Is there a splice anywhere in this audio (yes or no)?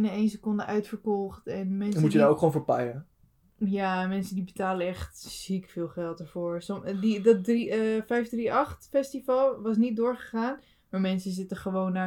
no